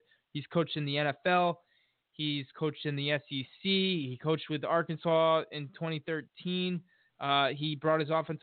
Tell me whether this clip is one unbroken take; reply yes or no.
yes